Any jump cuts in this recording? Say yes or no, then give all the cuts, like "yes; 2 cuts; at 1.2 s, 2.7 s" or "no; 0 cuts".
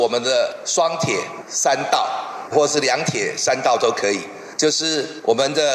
no; 0 cuts